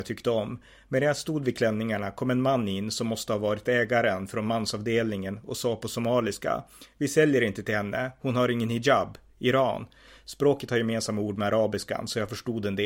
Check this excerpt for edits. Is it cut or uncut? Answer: uncut